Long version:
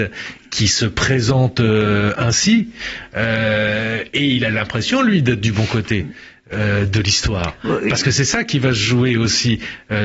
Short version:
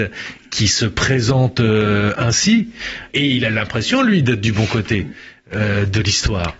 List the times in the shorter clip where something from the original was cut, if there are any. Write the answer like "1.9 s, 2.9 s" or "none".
3.1 s